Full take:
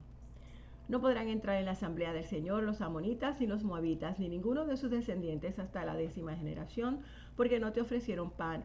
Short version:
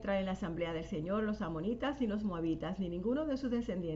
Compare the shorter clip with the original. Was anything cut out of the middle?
no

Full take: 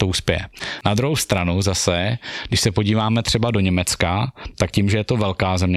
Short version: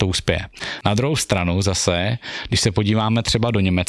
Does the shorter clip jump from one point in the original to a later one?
no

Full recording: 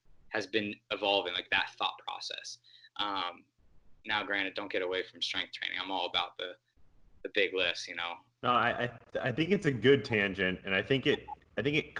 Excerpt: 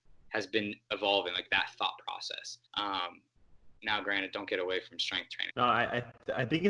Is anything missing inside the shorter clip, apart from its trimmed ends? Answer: yes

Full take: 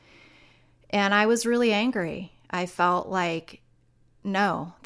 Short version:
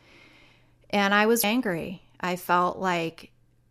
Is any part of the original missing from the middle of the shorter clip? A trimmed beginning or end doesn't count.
yes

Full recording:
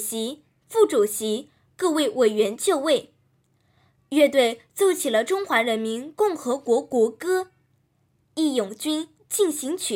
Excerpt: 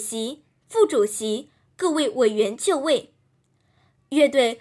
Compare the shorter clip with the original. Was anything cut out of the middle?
no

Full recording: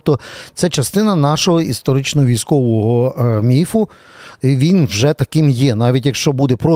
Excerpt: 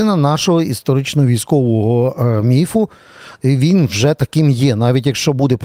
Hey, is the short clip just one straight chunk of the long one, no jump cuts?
yes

